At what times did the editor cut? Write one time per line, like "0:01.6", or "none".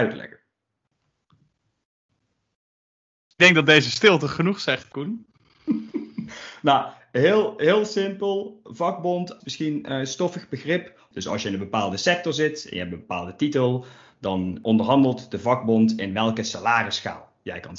0:09.4
0:11.1